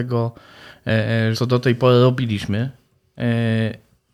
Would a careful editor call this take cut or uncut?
cut